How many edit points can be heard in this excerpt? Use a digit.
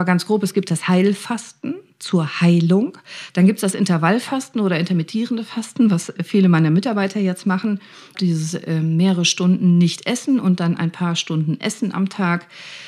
2